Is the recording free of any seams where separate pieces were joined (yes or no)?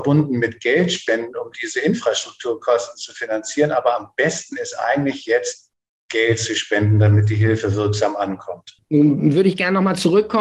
yes